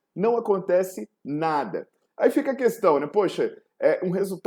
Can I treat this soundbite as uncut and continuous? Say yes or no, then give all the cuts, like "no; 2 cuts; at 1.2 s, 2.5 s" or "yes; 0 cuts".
yes; 0 cuts